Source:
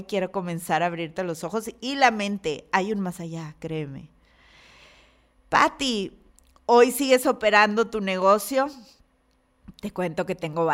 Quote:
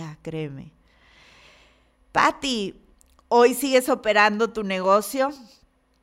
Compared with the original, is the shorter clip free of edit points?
yes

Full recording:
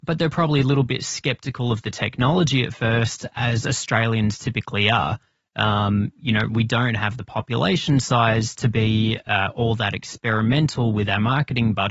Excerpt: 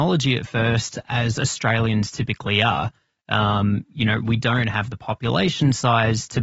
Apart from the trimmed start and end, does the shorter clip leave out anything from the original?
no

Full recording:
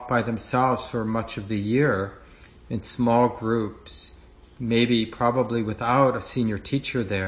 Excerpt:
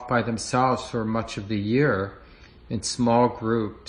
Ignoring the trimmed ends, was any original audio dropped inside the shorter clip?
no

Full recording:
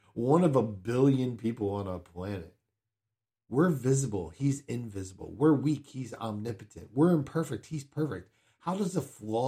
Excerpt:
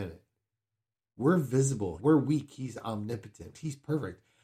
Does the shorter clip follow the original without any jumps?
no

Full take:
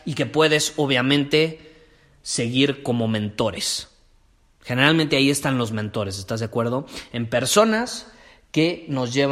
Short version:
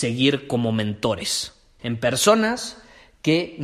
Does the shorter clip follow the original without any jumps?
no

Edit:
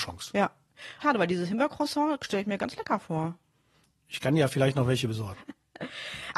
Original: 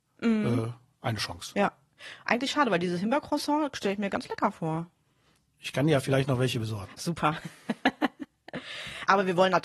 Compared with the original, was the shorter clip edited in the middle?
yes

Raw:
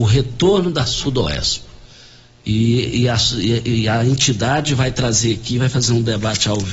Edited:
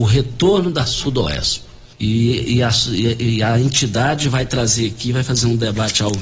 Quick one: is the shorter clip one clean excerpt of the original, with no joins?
no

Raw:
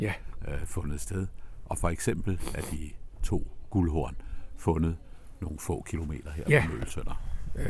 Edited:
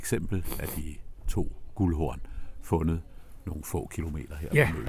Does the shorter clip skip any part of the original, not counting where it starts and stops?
no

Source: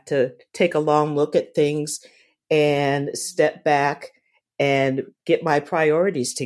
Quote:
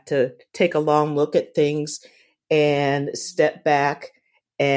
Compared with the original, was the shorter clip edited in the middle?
no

